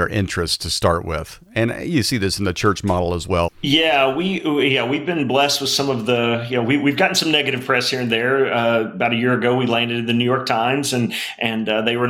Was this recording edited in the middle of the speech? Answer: yes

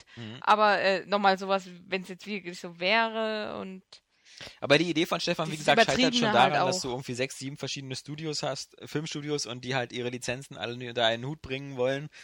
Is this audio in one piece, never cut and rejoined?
yes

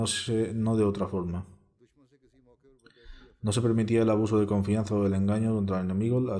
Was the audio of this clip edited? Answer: no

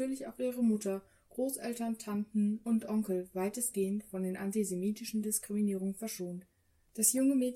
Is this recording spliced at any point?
no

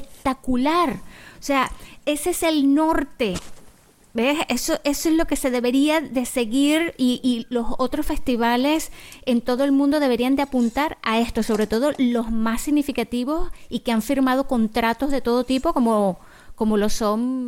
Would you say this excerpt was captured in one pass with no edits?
yes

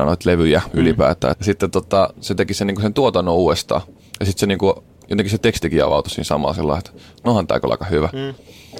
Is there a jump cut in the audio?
yes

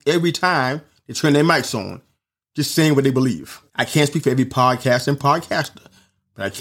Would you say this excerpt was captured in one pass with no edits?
no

